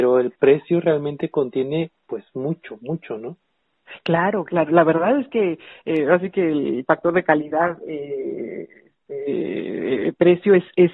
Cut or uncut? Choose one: uncut